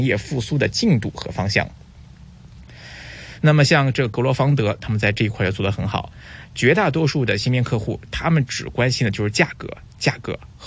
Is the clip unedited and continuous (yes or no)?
no